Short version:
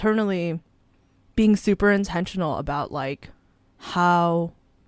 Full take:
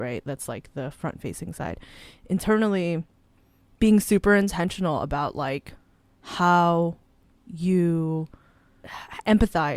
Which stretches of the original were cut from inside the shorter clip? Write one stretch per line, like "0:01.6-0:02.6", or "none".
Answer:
none